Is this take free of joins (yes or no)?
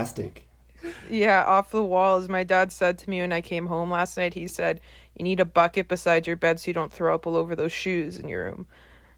yes